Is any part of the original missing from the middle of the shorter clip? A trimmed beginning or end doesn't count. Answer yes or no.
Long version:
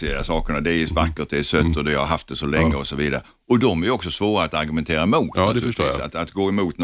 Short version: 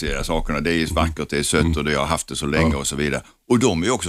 no